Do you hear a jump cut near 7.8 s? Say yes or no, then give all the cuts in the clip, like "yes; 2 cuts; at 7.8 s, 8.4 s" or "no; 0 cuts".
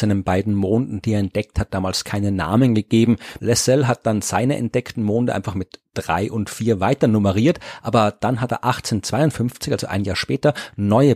no; 1 cut; at 3.4 s